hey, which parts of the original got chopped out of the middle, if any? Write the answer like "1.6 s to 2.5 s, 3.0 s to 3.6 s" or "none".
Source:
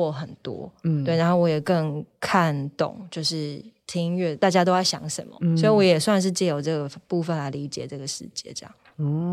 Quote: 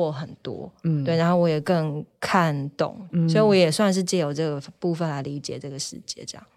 3.1 s to 5.4 s